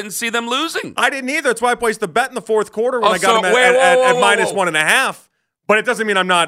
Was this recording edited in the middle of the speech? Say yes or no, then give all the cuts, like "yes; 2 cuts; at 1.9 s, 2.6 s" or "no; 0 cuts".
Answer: no; 0 cuts